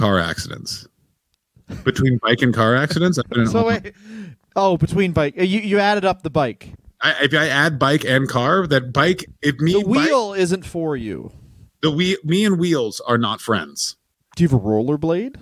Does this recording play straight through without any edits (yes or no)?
yes